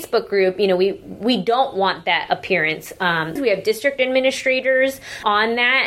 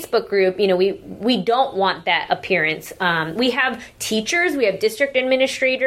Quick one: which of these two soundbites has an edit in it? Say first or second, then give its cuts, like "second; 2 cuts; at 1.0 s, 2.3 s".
first; 1 cut; at 3.4 s